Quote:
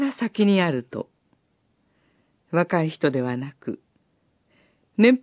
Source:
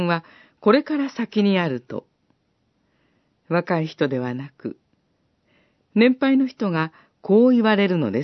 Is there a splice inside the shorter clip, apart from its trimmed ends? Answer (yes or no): no